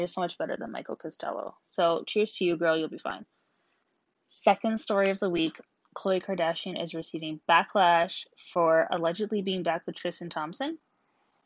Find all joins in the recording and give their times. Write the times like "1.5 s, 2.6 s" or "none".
none